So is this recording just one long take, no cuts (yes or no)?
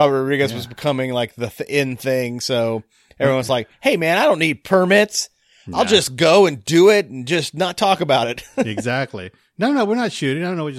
yes